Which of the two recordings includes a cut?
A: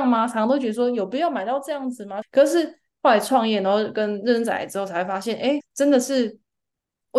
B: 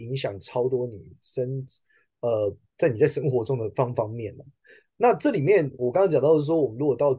A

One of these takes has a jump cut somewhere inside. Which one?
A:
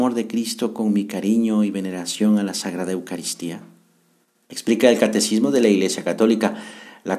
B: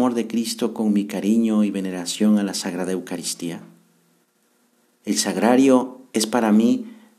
A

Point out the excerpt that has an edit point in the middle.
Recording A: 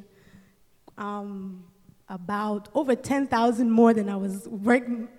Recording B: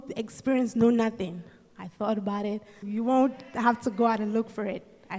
B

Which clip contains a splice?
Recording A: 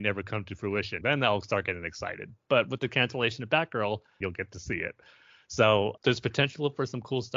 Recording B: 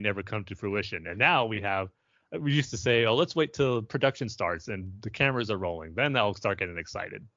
A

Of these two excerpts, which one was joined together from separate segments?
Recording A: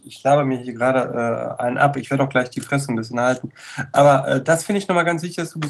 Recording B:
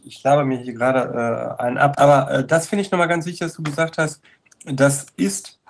B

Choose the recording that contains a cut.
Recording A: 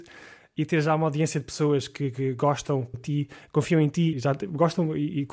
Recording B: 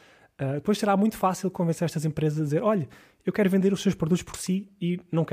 A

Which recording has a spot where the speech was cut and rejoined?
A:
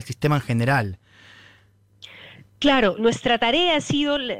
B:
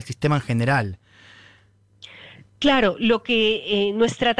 A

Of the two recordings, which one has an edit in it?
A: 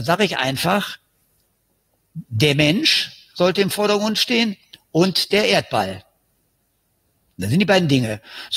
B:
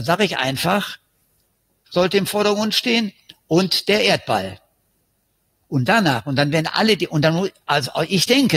B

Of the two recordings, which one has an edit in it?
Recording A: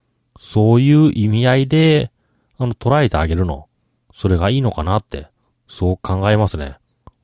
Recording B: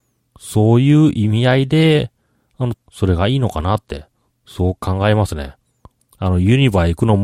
B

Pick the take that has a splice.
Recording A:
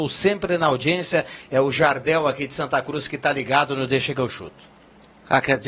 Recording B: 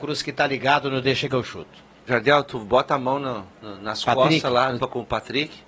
B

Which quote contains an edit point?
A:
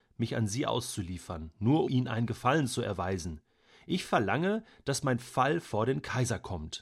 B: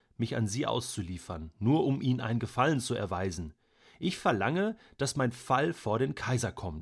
A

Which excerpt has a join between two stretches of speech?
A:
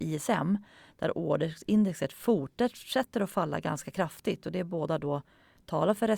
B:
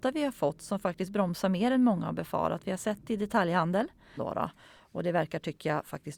B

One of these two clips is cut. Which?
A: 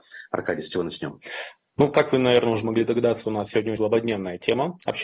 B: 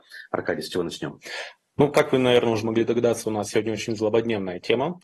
A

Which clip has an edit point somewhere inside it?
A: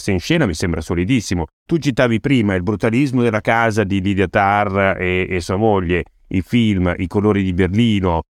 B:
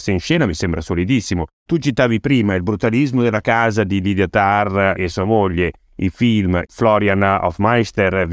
B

